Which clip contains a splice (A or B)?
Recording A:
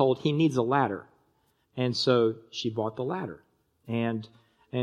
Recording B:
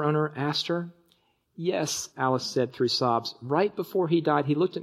B